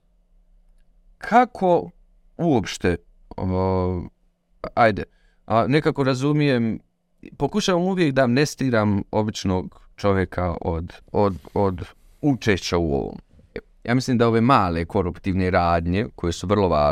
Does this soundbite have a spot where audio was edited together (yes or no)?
yes